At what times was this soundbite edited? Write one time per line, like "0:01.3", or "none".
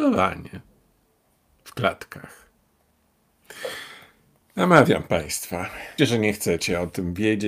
0:06.0